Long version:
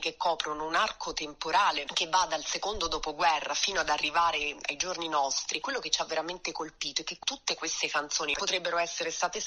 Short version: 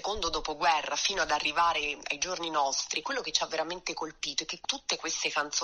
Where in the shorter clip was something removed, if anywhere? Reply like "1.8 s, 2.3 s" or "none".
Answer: none